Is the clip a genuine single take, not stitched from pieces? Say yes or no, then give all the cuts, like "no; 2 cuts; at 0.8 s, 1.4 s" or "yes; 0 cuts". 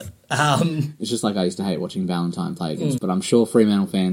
no; 2 cuts; at 1.0 s, 3.0 s